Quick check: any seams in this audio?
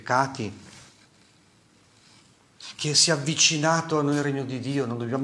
no; 0 cuts

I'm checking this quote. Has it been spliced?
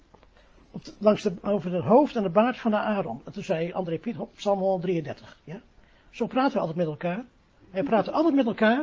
no; 0 cuts

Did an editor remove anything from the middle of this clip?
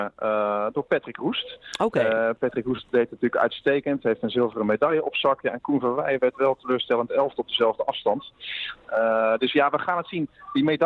yes; 1 cut; at 8.8 s

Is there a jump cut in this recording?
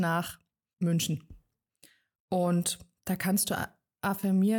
no; 0 cuts

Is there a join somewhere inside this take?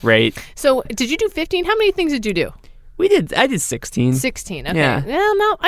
no; 0 cuts

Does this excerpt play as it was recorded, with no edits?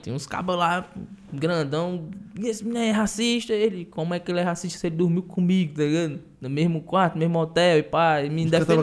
yes; 0 cuts

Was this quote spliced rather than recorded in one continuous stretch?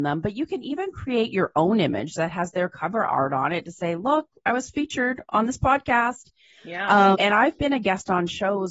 yes; 1 cut; at 7.1 s

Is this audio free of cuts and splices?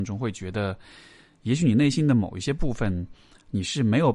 yes; 0 cuts

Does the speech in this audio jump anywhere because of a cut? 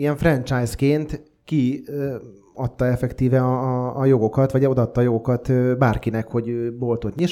no; 0 cuts

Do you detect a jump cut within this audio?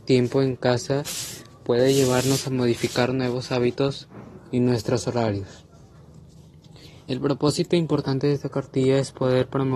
no; 0 cuts

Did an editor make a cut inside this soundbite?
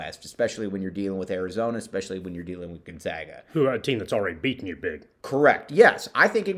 no; 0 cuts

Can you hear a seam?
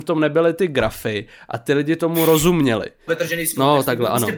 yes; 1 cut; at 3.1 s

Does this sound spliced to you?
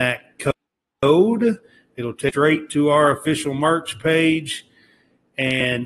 no; 0 cuts

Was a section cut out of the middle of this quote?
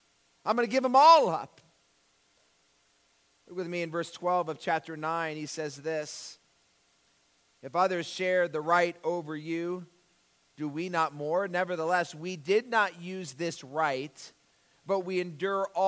no; 0 cuts

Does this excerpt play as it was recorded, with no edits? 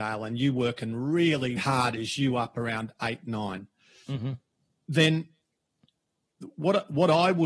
no; 1 cut; at 1.6 s

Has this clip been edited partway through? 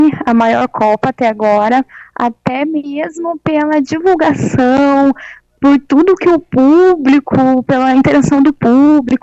no; 0 cuts

